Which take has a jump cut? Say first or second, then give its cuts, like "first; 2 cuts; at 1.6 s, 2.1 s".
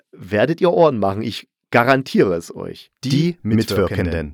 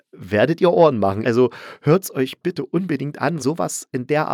second; 2 cuts; at 1.2 s, 3.4 s